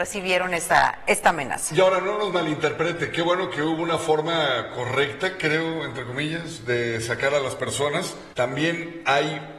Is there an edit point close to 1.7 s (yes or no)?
no